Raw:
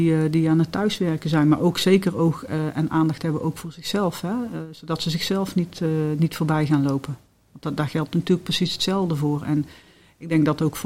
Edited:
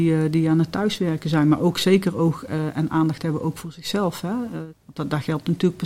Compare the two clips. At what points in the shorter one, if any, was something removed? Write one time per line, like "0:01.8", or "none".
0:04.7